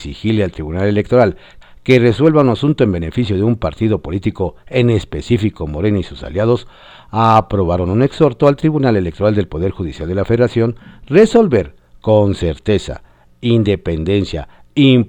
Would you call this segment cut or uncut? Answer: cut